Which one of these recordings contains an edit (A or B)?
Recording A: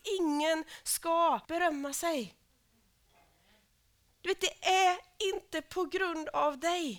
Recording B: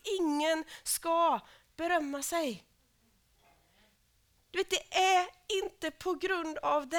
A